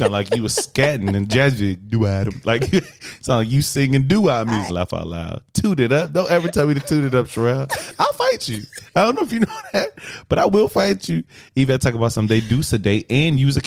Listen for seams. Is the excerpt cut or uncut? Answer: cut